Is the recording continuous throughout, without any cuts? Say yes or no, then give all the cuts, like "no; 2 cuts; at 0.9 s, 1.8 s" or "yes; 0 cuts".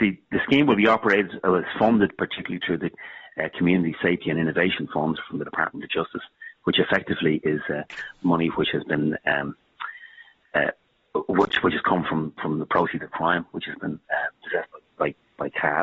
yes; 0 cuts